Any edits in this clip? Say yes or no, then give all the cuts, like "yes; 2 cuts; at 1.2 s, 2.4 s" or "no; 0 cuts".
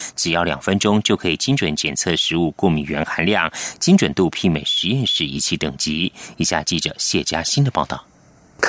no; 0 cuts